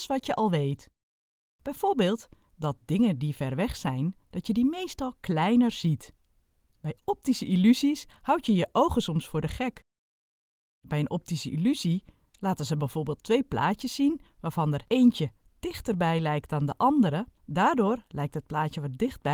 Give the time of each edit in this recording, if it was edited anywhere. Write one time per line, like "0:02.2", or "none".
0:17.4